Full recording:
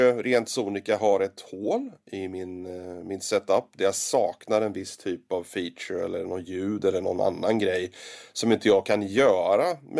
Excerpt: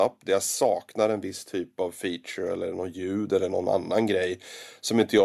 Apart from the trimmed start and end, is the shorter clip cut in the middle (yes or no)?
no